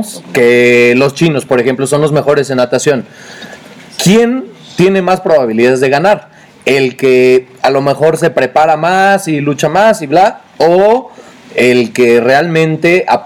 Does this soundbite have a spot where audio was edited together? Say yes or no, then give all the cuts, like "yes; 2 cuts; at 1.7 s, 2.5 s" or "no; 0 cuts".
no; 0 cuts